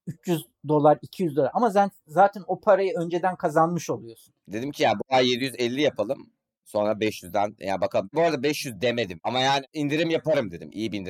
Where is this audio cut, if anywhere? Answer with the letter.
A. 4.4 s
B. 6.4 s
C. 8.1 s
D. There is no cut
A